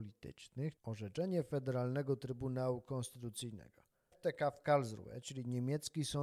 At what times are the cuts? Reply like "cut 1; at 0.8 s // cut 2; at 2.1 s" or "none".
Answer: cut 1; at 4.1 s